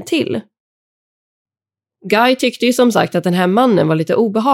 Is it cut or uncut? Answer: uncut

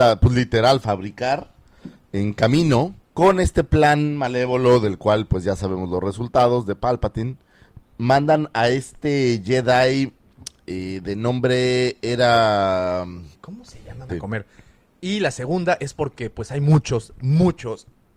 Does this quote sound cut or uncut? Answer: cut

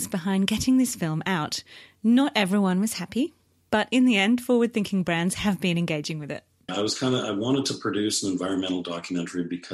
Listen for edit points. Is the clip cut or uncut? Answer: cut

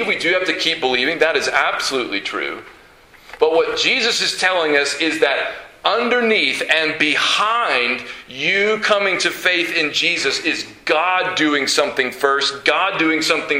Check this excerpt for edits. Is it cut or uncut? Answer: uncut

